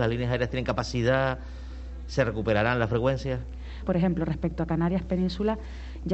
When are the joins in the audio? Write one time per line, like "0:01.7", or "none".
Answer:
0:03.8